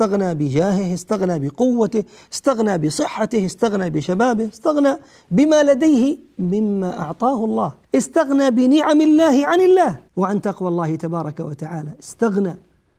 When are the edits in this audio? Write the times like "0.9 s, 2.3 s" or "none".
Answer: 7.8 s, 10.1 s

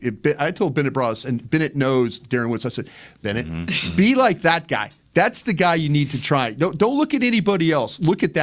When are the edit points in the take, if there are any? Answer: 3.2 s

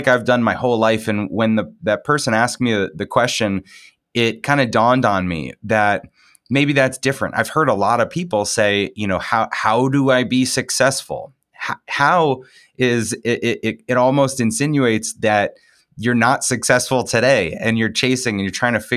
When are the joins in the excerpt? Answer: none

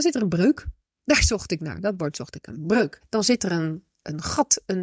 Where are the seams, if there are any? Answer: 3.0 s

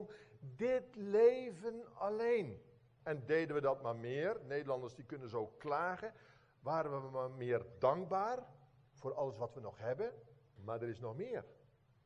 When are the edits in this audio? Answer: 3.0 s, 10.6 s

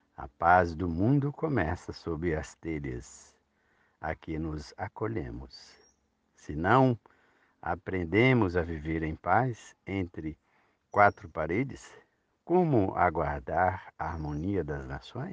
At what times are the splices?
none

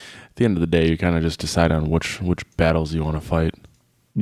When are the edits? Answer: none

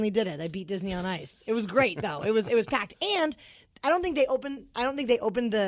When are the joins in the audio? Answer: none

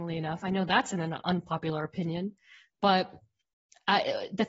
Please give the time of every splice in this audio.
none

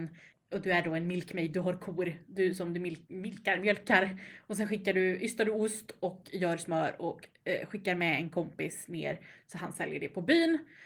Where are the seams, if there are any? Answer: none

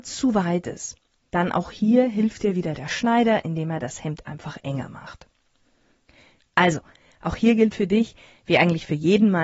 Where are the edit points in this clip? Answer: 6.4 s

